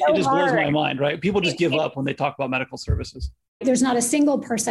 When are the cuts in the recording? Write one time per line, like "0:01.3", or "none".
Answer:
0:03.6